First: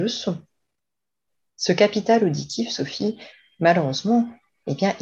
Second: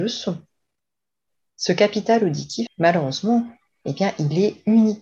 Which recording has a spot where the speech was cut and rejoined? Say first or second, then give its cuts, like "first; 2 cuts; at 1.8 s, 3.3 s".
second; 1 cut; at 2.7 s